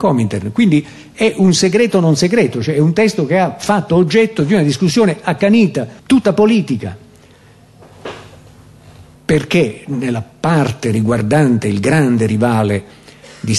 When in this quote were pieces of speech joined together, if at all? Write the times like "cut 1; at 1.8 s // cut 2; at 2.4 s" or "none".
cut 1; at 6.0 s // cut 2; at 9.2 s

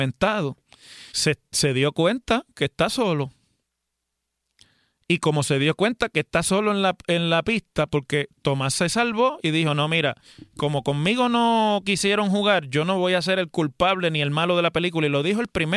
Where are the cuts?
cut 1; at 1.1 s

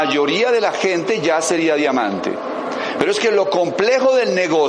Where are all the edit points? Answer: none

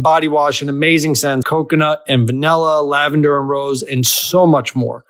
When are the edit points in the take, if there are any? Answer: cut 1; at 1.4 s

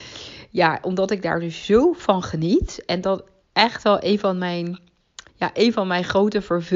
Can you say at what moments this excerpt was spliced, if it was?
cut 1; at 5.3 s

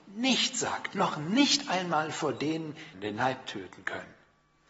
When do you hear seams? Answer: cut 1; at 0.9 s // cut 2; at 2.9 s

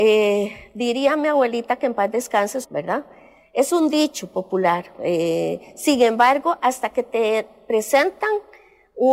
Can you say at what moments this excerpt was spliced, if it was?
cut 1; at 2.6 s

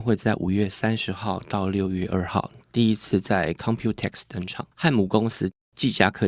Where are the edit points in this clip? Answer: cut 1; at 4.7 s

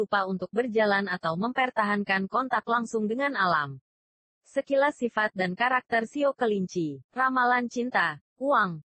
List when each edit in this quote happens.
cut 1; at 7.1 s

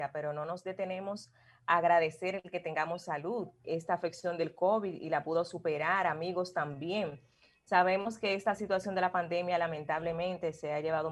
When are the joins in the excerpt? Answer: cut 1; at 3.6 s

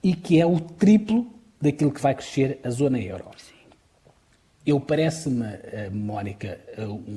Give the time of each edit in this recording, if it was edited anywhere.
none

